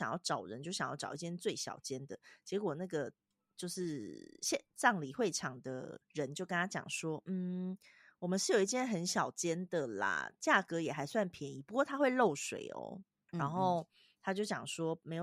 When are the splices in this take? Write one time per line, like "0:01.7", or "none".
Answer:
0:13.3

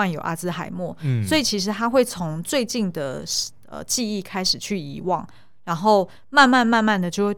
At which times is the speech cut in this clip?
none

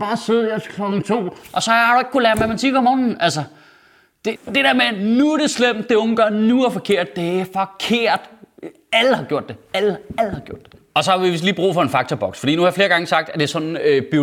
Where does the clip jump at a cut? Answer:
0:04.4

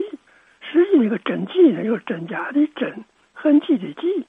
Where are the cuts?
none

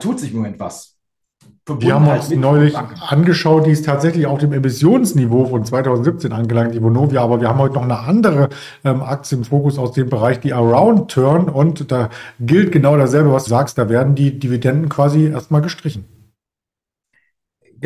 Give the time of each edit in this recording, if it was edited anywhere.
0:13.5

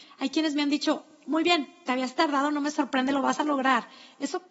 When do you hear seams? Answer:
none

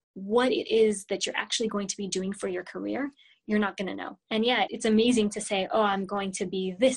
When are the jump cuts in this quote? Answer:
0:04.2

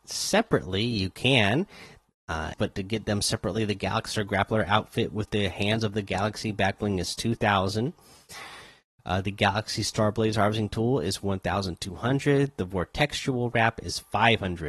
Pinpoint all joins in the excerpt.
0:02.5

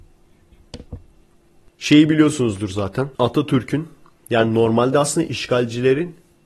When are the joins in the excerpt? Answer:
0:03.1

